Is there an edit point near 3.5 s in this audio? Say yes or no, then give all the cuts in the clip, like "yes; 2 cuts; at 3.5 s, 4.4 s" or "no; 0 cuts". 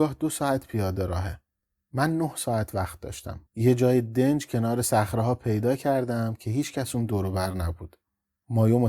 yes; 1 cut; at 3.5 s